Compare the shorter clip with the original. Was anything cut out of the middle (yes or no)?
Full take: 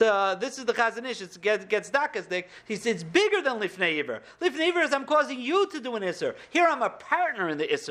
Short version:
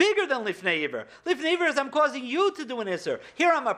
no